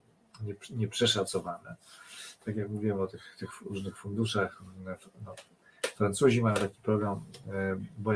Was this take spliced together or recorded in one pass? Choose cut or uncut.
uncut